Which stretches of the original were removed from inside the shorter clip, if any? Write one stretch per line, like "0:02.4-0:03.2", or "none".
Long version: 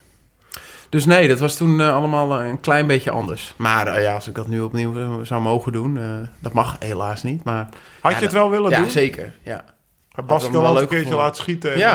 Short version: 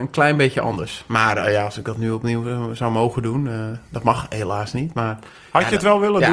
none